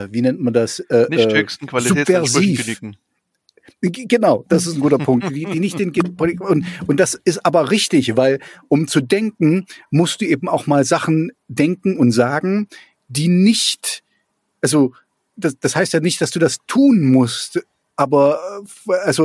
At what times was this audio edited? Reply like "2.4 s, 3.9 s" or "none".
none